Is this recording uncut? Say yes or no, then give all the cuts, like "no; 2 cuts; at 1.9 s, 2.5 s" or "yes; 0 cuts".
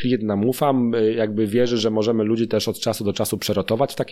yes; 0 cuts